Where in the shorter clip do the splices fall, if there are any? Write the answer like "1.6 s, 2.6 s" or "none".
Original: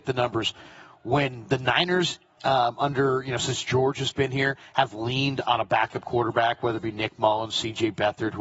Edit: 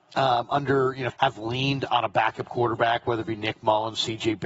1.1 s